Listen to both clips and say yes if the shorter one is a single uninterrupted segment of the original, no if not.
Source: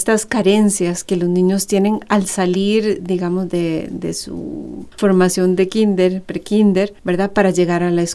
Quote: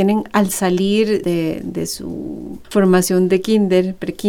no